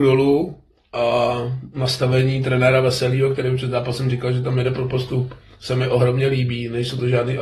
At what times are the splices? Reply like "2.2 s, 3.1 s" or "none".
none